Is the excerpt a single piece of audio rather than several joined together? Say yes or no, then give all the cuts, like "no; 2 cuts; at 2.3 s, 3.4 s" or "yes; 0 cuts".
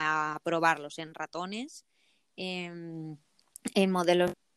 yes; 0 cuts